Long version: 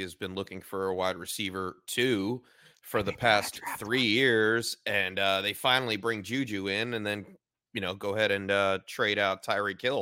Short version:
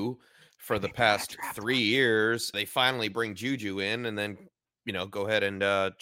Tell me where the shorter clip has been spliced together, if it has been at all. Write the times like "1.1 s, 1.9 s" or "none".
2.5 s

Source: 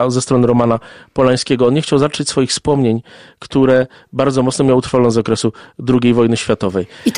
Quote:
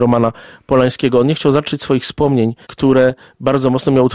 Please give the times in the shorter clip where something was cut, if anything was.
2.6 s

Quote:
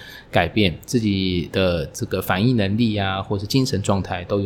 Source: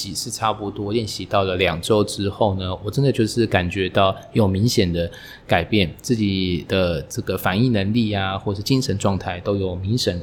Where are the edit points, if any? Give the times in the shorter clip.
none

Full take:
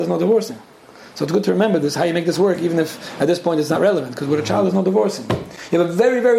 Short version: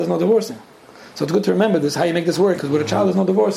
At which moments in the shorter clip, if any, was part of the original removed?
2.6 s

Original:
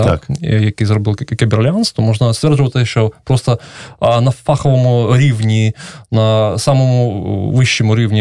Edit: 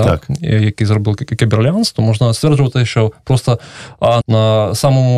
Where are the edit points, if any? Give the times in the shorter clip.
4.2 s

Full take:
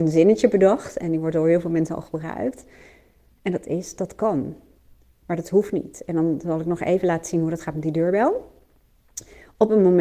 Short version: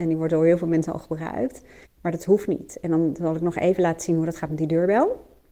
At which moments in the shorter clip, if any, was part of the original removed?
1.8 s

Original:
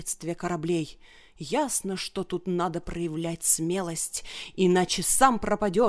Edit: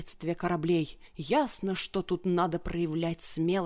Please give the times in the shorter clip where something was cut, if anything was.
1.1 s

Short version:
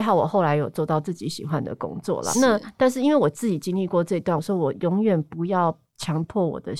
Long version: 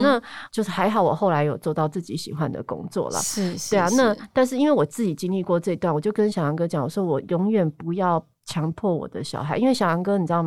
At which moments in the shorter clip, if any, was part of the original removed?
2.3 s, 4.4 s

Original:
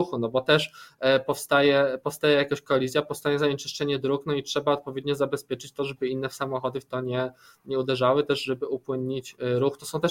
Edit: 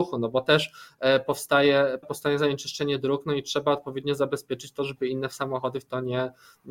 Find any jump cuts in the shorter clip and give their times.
2.0 s

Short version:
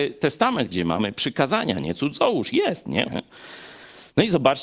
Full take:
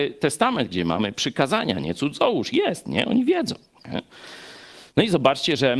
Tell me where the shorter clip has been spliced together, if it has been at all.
3.0 s

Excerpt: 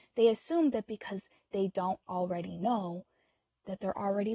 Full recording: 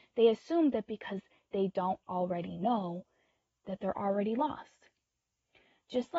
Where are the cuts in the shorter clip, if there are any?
none

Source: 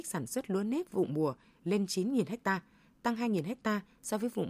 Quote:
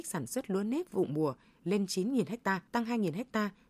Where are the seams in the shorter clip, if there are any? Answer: 2.7 s

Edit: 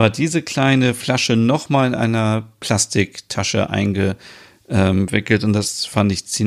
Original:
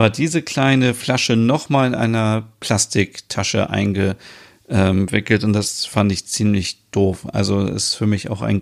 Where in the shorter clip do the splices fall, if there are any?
none

